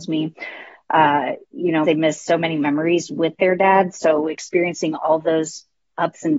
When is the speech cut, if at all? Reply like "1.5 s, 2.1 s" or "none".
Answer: 1.8 s